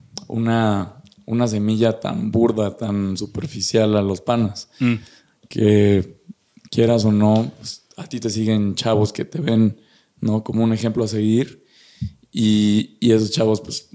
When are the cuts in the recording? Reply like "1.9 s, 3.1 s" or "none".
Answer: none